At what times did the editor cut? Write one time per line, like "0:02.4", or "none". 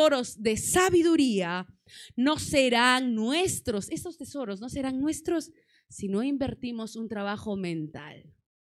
none

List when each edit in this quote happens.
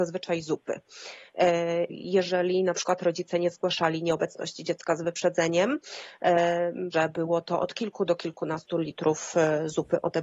0:01.9
0:06.9

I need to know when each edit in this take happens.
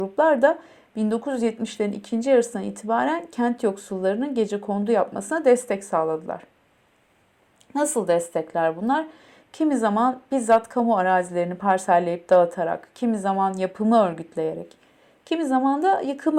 none

